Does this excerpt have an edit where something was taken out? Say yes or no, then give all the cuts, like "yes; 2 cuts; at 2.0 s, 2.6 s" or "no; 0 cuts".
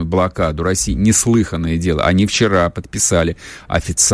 no; 0 cuts